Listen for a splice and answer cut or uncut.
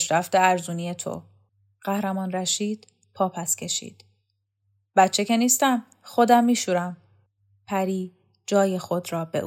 uncut